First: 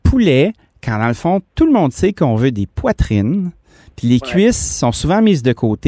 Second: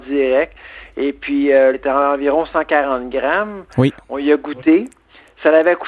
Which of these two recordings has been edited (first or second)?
second